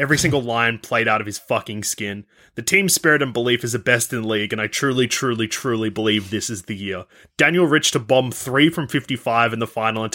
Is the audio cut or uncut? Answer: uncut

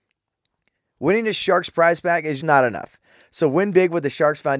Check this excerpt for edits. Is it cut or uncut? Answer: cut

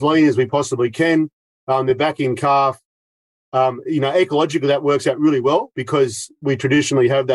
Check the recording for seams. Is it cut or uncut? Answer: uncut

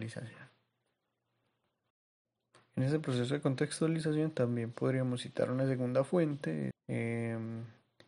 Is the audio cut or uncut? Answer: cut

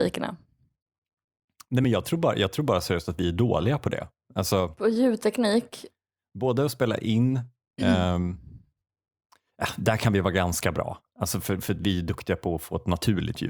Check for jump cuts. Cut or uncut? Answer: uncut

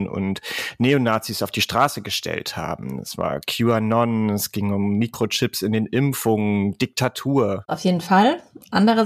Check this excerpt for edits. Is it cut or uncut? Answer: uncut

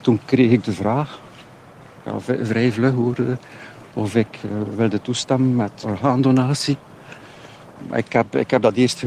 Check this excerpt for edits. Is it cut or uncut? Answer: cut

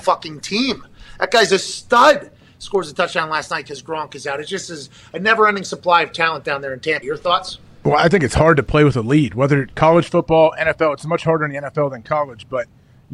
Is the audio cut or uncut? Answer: cut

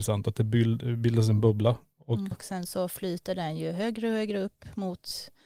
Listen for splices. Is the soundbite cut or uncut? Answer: cut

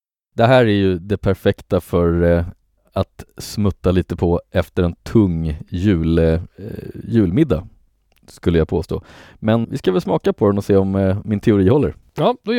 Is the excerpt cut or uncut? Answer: cut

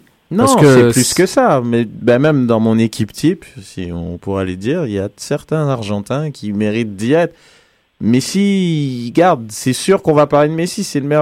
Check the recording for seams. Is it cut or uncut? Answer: uncut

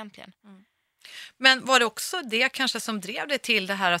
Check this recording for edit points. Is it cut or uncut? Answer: uncut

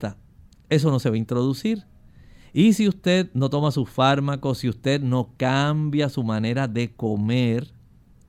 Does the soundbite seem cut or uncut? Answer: uncut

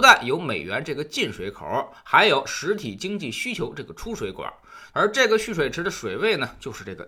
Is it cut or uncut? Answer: cut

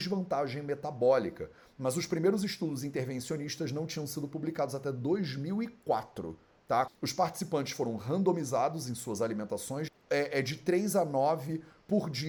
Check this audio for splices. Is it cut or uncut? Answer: cut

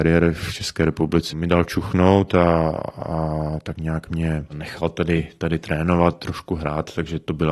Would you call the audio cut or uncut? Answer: cut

